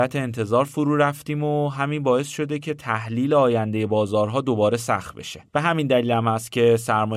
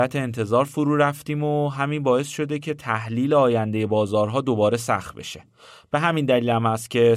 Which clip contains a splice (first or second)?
first